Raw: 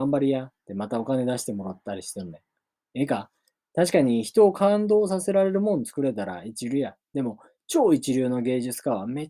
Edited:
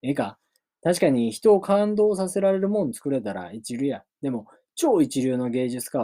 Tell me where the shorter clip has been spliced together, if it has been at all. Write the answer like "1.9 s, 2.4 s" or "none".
none